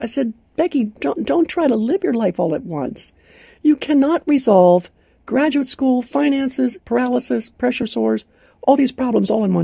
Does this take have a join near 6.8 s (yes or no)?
yes